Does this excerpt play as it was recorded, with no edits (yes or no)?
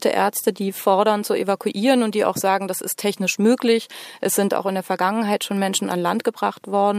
yes